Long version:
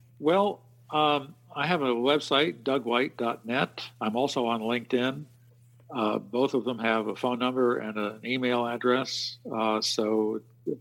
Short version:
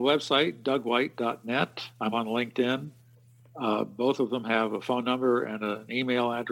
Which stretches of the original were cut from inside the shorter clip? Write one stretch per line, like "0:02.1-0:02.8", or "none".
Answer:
0:04.1-0:04.5